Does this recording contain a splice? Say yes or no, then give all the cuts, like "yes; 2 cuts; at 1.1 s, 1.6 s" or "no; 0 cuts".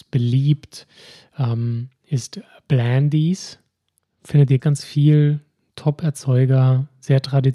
yes; 1 cut; at 4.6 s